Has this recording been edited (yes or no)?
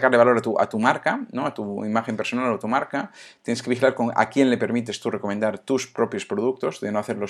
no